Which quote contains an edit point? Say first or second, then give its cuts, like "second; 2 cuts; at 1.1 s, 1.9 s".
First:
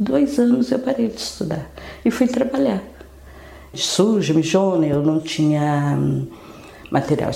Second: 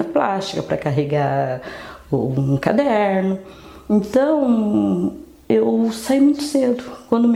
first; 1 cut; at 3.7 s